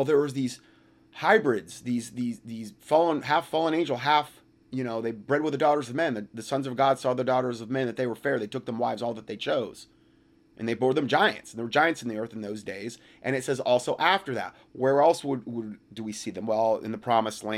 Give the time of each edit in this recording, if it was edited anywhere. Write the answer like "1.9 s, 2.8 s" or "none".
none